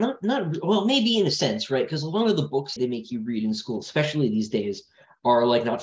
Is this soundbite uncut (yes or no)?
no